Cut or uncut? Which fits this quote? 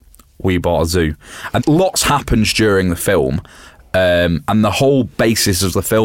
cut